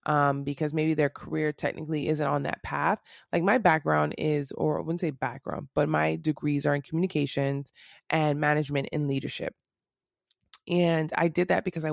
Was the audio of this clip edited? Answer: no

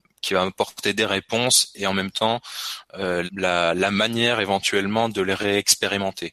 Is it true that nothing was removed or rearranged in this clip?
no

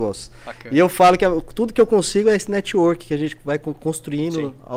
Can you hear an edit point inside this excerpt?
no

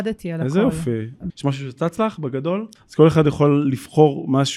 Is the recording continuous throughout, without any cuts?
no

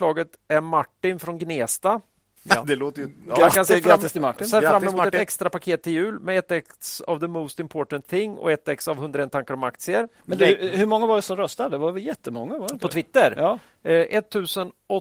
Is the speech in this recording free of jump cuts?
yes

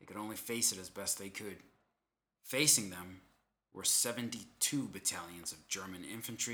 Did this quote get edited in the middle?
yes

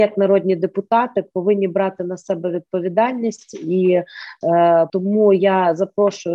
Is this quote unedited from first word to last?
no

